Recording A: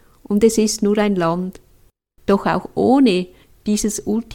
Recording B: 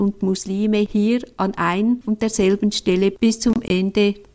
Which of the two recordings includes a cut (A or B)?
A